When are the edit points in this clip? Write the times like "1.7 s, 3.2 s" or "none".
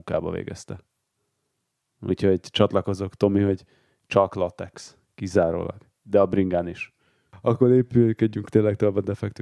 none